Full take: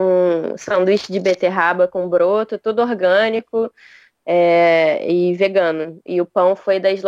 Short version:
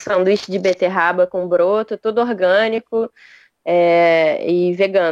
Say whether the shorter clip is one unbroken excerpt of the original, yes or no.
yes